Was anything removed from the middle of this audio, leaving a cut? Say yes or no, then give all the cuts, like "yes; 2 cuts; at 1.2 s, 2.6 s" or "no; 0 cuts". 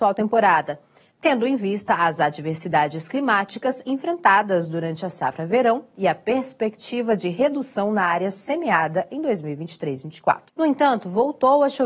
yes; 1 cut; at 10.5 s